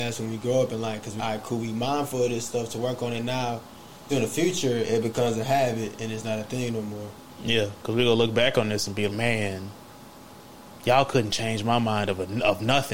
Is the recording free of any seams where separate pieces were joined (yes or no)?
no